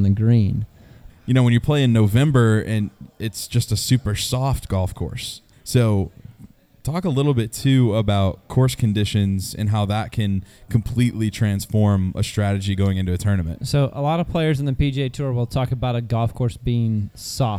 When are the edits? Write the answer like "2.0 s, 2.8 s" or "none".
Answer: 1.1 s, 5.5 s